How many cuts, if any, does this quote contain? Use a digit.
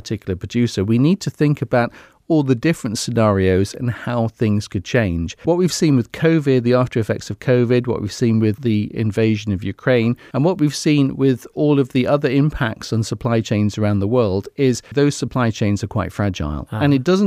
2